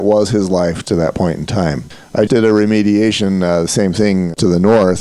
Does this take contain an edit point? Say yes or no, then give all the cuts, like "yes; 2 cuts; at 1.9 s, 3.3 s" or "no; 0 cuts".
yes; 1 cut; at 2.3 s